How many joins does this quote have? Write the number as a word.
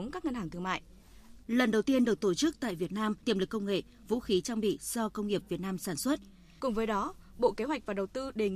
three